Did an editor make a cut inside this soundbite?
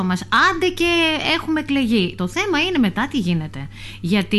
no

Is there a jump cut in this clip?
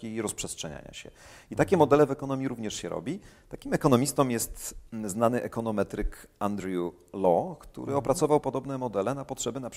no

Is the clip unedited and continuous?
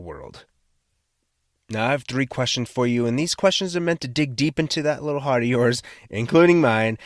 yes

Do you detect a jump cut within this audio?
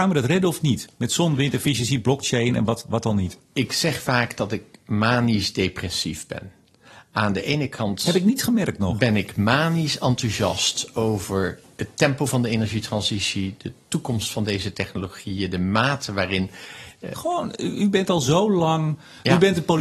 yes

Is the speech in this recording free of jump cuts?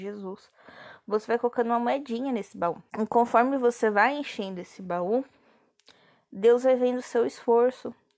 no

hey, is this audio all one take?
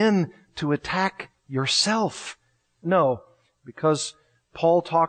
no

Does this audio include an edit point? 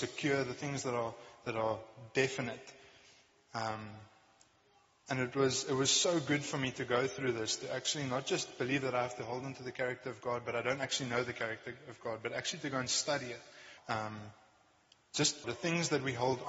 yes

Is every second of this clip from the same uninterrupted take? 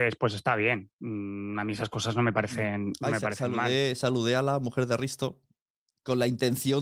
yes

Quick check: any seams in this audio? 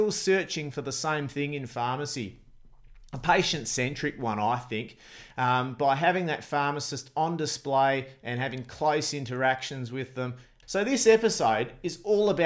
yes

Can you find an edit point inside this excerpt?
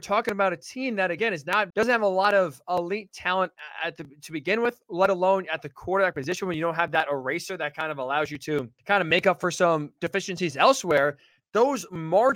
yes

